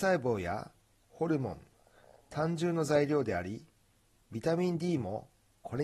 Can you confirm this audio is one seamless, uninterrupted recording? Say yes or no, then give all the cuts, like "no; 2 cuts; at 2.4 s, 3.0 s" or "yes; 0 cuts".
yes; 0 cuts